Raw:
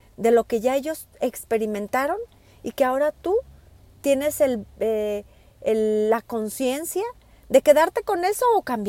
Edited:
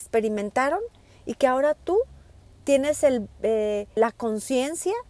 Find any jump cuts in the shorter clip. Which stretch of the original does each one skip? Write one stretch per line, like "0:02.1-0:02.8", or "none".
0:05.3-0:06.1

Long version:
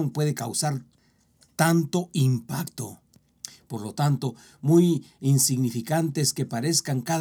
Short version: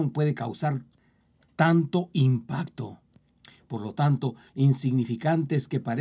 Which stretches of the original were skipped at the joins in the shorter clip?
0:04.5-0:05.1

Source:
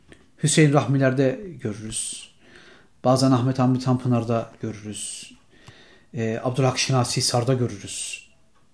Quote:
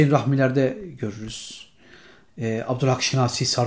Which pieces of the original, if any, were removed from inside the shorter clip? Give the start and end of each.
0:02.9-0:06.0

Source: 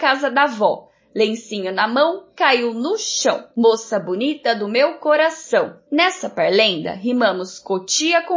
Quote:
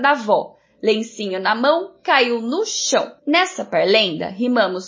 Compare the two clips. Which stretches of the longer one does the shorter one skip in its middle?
0:03.5-0:05.8

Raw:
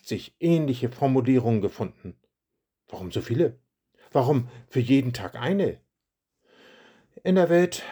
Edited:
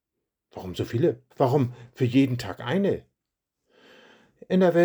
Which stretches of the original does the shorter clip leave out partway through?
0:03.7-0:04.1

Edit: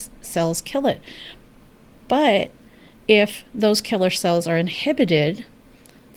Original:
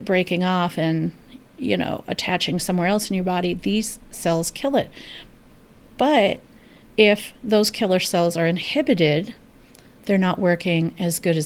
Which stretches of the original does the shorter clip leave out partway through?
none

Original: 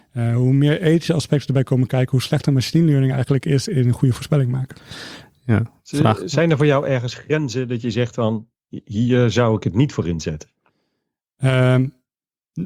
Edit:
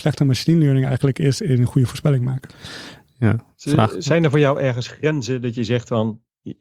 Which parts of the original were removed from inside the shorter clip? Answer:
none

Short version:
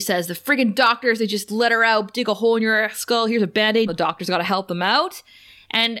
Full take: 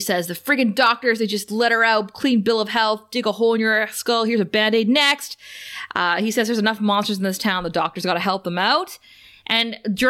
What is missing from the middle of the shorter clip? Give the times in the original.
0:02.1-0:03.1
0:04.8-0:07.6

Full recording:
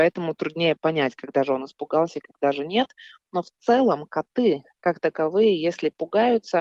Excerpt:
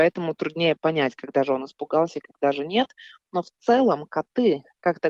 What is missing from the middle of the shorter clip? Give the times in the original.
none

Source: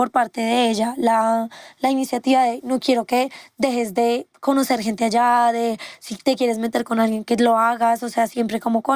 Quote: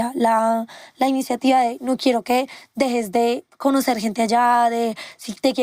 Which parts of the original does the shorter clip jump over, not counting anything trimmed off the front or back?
none

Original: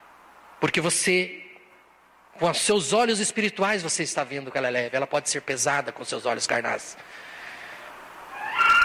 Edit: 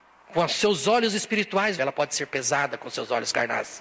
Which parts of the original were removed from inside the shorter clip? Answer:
0:03.8-0:04.9

